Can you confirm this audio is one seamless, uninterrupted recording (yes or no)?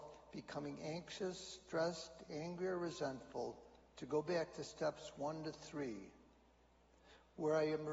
yes